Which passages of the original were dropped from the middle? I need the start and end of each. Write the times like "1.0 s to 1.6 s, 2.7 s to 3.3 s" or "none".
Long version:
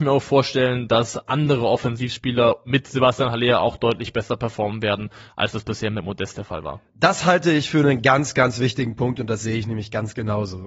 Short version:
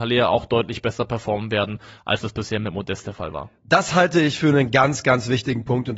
none